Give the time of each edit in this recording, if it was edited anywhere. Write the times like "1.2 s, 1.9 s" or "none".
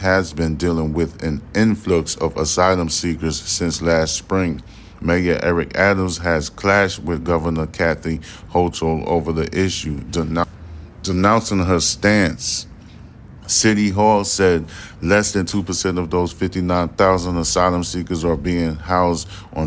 5.0 s, 13.4 s